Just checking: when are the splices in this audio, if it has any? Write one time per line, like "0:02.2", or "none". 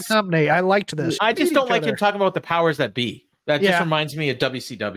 0:01.2